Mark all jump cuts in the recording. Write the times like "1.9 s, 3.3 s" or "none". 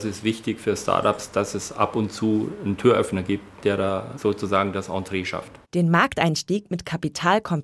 none